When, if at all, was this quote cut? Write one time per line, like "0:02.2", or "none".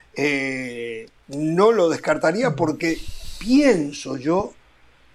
0:01.2